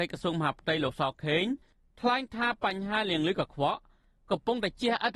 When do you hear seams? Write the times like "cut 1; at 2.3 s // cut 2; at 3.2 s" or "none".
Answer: none